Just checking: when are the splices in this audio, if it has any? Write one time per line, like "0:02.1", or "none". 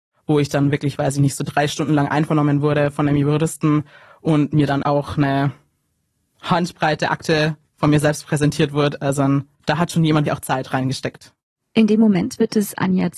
0:04.8
0:10.3